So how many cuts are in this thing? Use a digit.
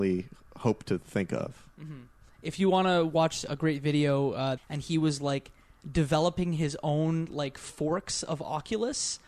1